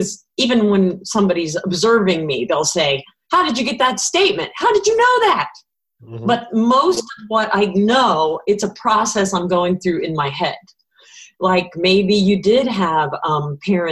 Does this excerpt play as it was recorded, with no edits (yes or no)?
no